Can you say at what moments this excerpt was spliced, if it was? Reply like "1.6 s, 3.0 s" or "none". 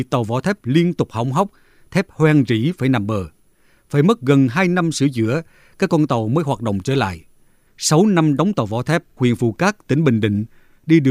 7.7 s, 9.2 s

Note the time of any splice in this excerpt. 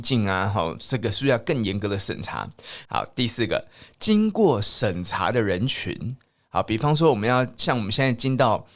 2.9 s

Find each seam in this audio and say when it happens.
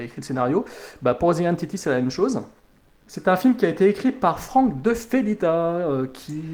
3.0 s

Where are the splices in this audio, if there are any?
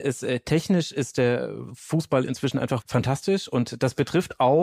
2.8 s

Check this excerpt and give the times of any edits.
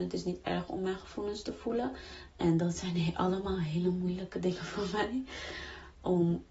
2.3 s

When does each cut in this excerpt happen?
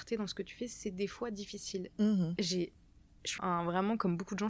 2.4 s, 3.4 s

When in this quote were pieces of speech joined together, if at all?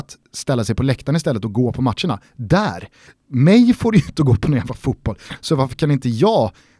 none

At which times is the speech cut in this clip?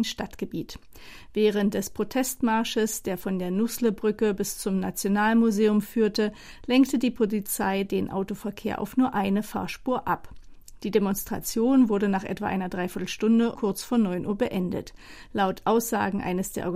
13.5 s

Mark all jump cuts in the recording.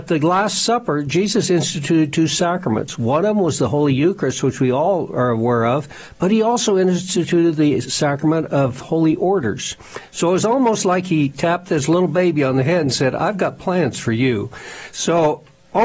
none

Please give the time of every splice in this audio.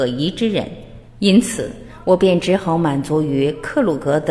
1.1 s

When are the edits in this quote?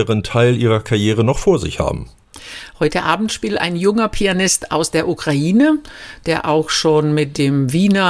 none

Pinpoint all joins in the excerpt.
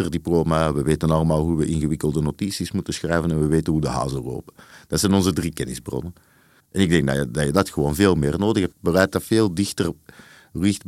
6.6 s, 8.7 s

